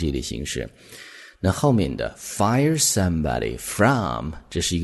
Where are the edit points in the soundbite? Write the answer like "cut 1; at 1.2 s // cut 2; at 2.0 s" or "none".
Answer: none